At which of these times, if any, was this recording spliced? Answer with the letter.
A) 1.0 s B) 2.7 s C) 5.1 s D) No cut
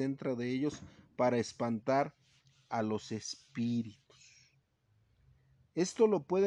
D